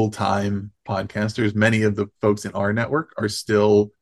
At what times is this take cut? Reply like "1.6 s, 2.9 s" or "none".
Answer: none